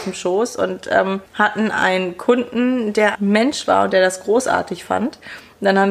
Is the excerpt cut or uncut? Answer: cut